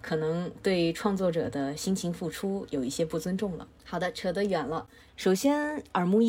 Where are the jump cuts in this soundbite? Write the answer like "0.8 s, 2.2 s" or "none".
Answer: 3.8 s, 5.1 s